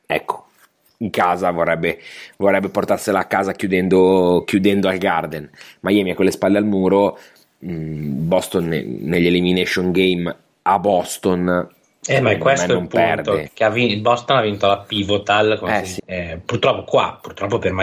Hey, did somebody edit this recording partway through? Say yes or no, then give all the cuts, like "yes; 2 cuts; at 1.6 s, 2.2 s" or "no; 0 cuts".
yes; 2 cuts; at 13.5 s, 16.0 s